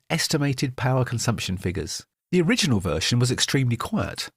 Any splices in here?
yes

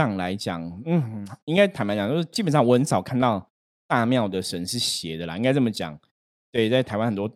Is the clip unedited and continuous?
yes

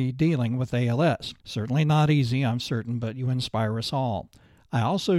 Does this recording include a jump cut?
yes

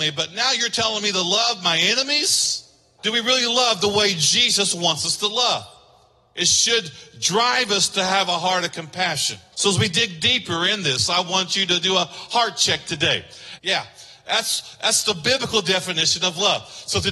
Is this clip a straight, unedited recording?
no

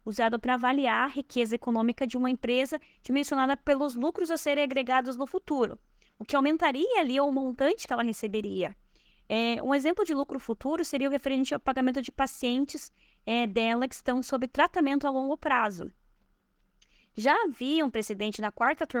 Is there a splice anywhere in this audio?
no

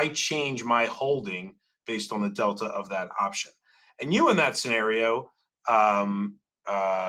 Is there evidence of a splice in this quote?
no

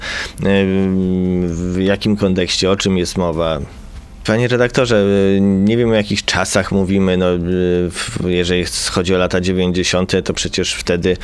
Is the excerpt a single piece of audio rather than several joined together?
no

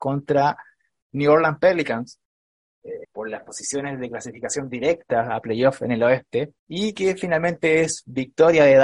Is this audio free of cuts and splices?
no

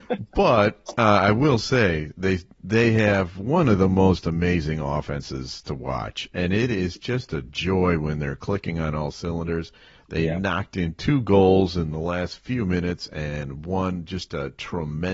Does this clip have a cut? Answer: no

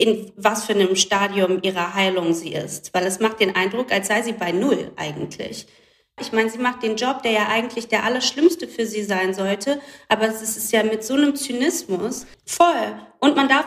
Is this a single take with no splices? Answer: no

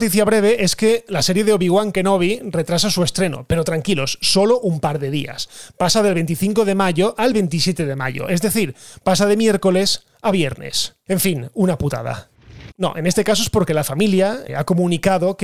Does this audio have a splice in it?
yes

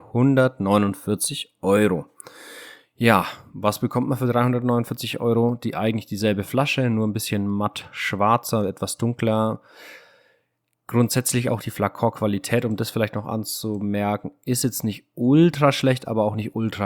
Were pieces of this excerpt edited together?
no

